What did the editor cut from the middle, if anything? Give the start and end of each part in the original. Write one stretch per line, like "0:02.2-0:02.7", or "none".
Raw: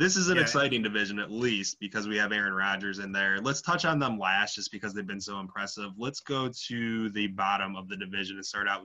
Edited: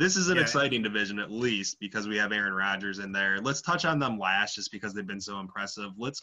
none